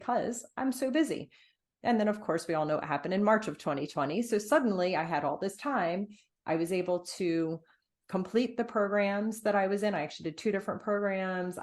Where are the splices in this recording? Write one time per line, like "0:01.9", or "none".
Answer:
none